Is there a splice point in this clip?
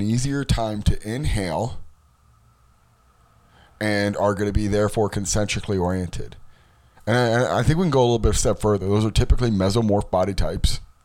no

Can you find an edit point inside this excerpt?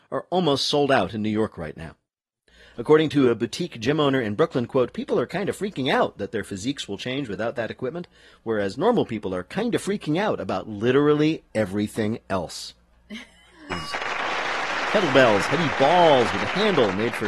yes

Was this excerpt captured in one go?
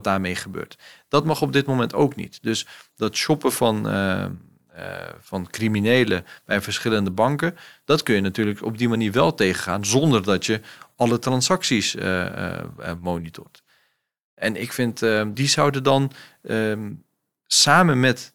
no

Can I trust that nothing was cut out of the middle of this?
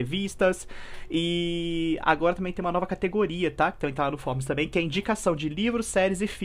yes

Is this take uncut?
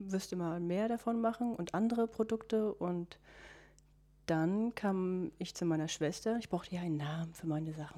yes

